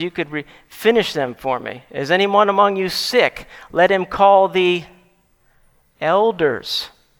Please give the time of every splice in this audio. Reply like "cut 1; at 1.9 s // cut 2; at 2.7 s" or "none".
none